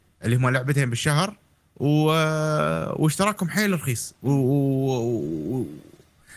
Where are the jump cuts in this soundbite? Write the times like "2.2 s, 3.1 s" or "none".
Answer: none